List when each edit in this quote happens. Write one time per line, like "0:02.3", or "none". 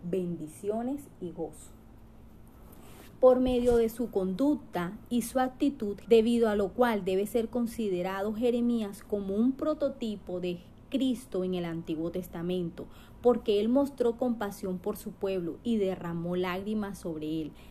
0:06.0